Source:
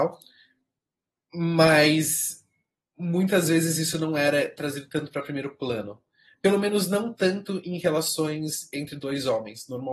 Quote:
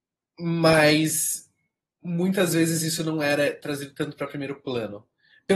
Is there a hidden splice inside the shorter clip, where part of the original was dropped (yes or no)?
no